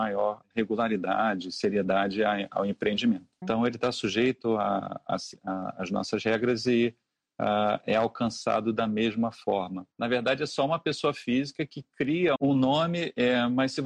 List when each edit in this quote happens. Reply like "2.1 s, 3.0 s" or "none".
3.4 s, 9.9 s, 12.4 s